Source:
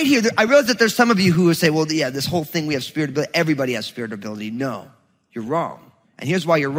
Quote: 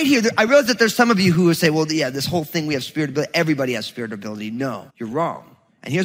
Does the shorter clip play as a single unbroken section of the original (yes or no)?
no